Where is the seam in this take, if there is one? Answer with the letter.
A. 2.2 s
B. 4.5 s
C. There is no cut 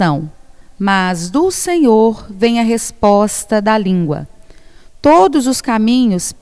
C